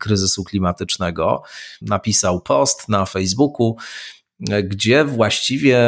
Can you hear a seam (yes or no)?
yes